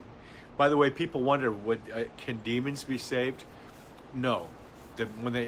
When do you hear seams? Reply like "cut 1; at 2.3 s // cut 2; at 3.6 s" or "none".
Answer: cut 1; at 2.2 s